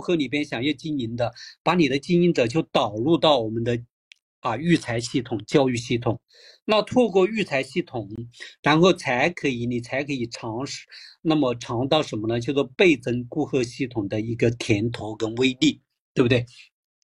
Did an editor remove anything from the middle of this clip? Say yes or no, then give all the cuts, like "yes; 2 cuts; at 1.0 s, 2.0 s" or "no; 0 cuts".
no; 0 cuts